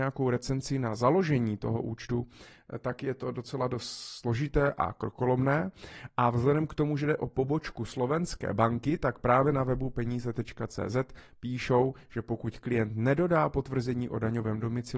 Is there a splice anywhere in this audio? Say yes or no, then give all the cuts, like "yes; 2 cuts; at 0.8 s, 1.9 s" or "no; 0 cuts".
no; 0 cuts